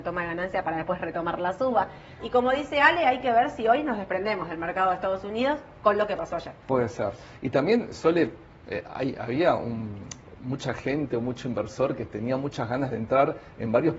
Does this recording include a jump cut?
yes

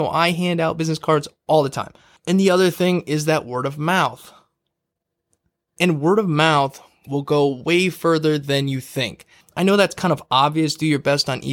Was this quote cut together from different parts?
yes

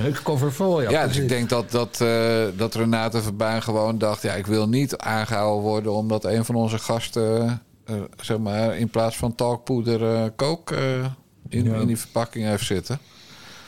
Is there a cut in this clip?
no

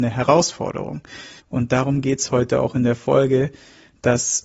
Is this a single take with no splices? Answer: no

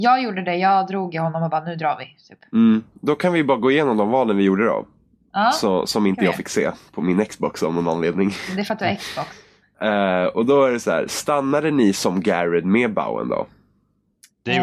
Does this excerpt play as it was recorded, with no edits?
no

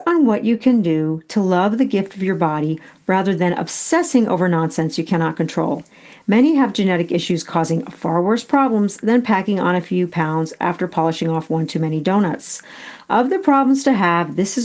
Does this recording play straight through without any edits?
yes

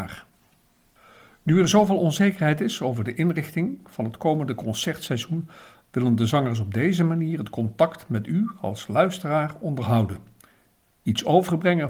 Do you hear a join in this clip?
no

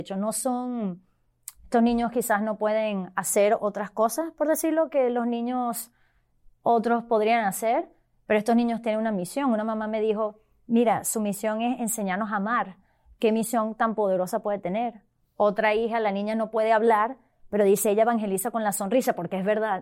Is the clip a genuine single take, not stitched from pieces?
yes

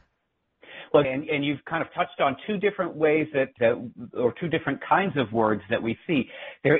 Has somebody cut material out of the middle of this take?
yes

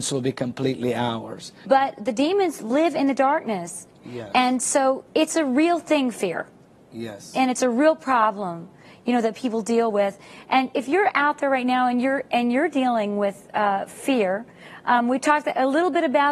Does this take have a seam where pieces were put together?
yes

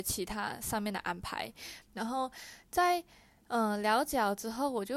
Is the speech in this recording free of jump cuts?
no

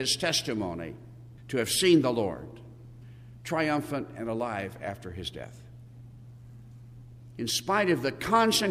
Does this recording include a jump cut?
yes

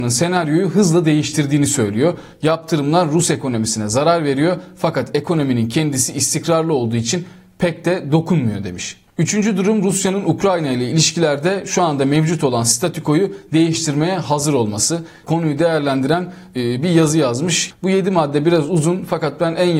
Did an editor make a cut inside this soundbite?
yes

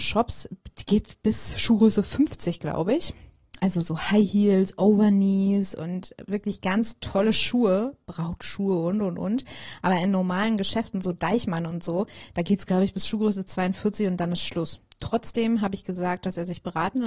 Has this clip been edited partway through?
no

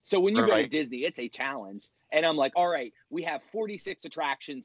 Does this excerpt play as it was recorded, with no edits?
yes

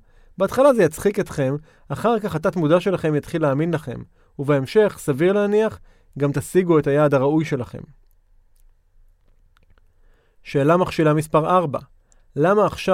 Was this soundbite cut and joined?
no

